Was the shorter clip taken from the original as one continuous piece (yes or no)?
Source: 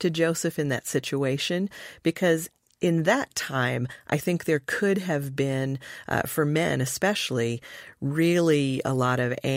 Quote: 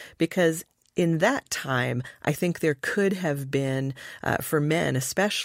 yes